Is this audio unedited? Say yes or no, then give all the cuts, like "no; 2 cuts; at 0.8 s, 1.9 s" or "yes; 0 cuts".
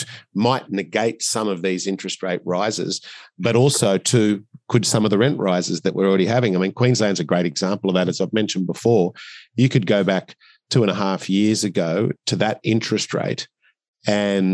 yes; 0 cuts